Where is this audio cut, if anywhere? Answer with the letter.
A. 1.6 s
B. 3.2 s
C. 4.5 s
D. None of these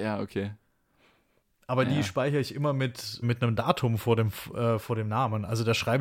B